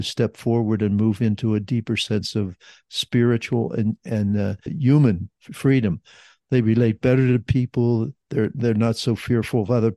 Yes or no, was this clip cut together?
yes